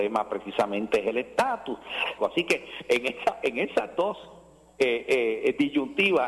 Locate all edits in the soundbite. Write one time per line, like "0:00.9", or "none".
0:02.2